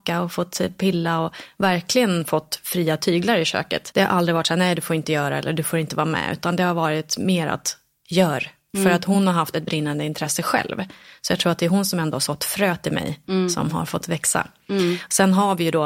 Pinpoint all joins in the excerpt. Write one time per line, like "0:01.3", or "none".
0:03.9